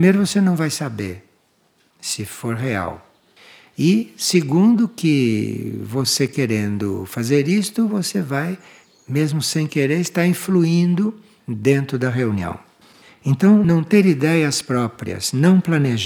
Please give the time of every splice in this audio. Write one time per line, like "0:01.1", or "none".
none